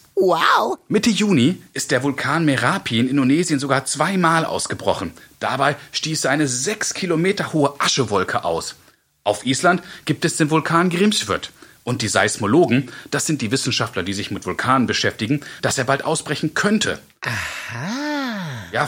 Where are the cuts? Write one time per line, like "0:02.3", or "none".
0:15.6